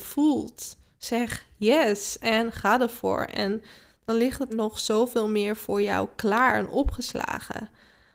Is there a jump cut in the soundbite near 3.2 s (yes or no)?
no